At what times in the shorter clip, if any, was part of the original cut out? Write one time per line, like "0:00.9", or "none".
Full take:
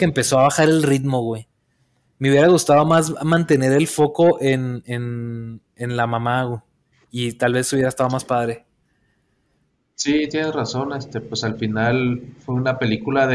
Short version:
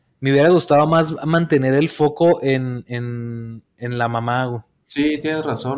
0:04.8

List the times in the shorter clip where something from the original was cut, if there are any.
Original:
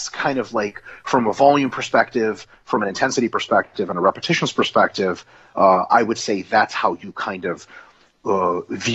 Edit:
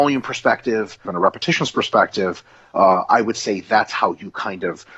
0:01.0

